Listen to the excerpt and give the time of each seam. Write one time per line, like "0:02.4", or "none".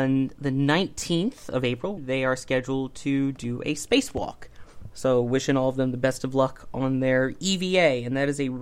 0:02.0